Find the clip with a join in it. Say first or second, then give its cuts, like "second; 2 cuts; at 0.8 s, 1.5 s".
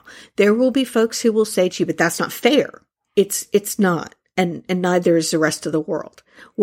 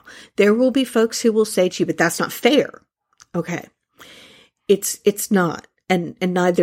first; 1 cut; at 3.0 s